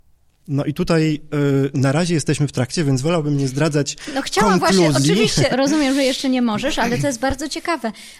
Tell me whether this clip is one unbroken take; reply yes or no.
no